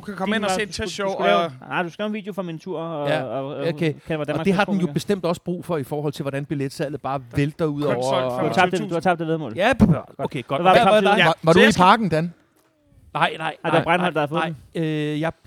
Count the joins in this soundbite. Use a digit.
0